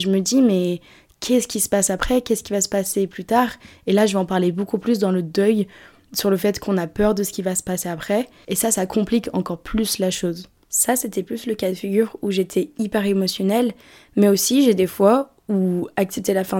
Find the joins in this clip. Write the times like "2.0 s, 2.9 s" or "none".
8.4 s